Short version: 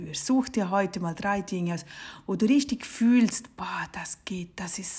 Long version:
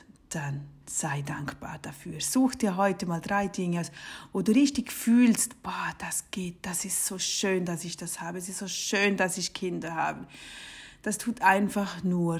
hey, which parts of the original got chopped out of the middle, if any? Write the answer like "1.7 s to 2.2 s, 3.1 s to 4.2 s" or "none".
none

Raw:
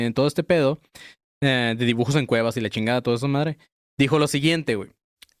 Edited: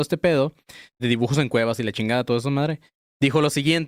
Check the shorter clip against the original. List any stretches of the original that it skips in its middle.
1.3 s to 1.8 s

